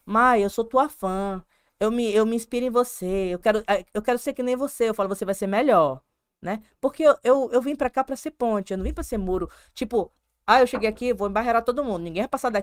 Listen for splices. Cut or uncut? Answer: uncut